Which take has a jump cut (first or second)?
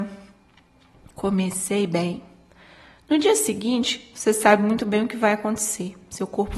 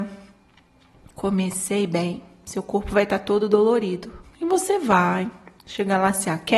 second